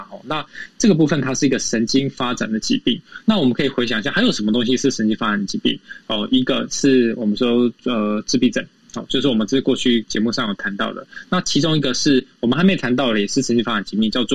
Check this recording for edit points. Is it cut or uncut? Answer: uncut